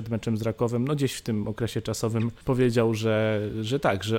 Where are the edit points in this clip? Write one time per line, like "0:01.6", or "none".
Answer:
0:02.4